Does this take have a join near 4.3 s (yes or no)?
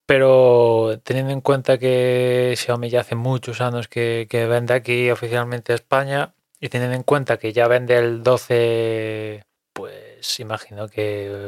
no